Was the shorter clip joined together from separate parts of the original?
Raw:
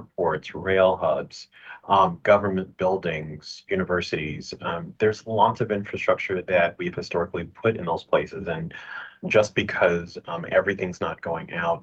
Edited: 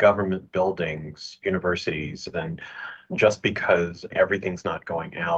yes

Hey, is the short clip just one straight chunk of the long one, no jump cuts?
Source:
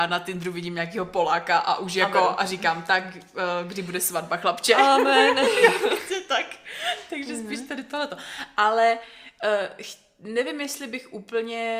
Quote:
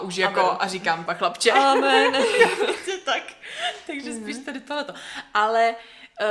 no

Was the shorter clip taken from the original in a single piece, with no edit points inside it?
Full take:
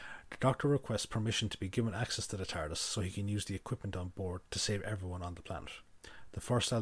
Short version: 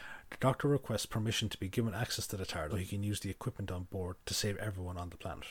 no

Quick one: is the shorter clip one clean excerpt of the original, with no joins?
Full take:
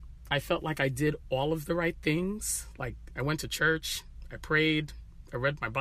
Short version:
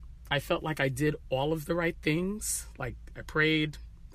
no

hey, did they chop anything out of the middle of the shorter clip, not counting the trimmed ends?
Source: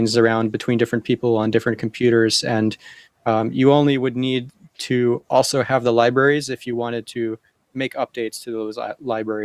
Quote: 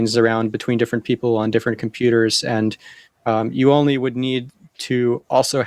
no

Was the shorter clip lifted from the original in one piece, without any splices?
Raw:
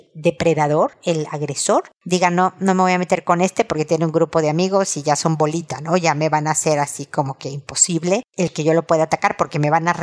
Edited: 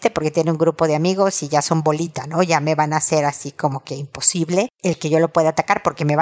yes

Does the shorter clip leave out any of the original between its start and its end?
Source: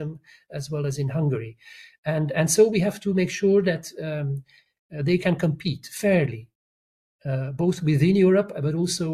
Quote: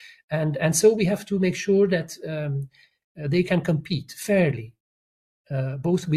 no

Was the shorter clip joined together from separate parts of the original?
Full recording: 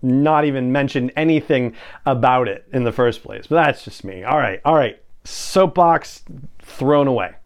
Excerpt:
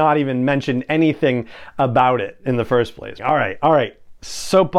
yes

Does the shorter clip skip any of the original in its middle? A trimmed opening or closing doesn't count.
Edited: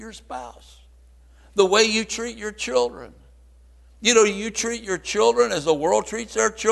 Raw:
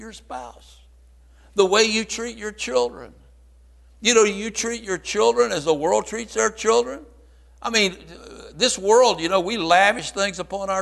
no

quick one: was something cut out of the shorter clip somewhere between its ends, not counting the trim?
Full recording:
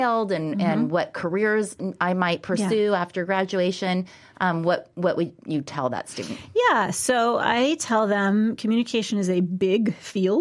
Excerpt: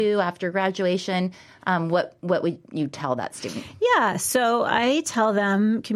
no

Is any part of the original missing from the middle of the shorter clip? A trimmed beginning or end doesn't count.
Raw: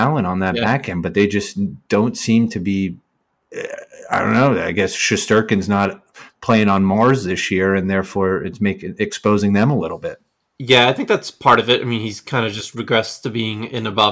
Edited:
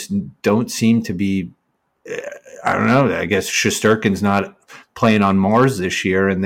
no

